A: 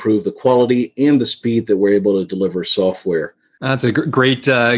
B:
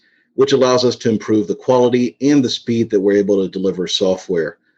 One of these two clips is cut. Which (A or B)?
A